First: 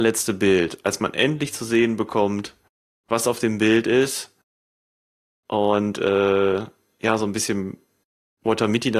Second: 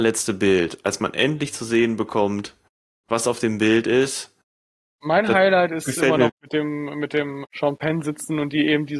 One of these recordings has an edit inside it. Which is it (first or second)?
second